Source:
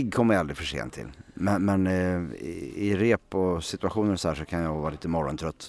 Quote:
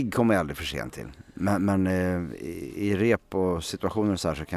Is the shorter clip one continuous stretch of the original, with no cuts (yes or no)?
yes